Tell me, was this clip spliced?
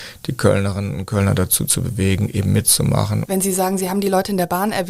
yes; 1 cut; at 3.3 s

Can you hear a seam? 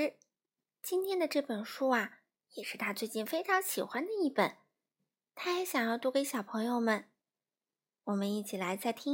no; 0 cuts

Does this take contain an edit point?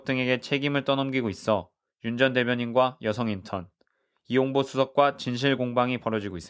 no; 0 cuts

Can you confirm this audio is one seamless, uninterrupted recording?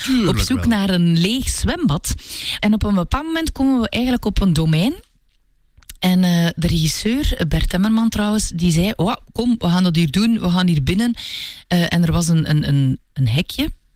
no; 1 cut; at 2.6 s

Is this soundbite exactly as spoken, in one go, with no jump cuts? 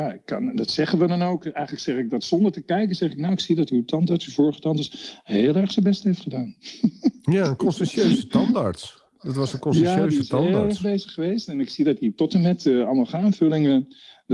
yes; 0 cuts

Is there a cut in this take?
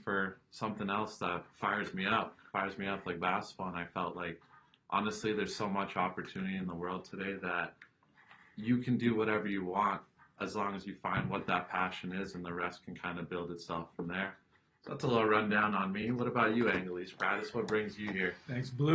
no; 0 cuts

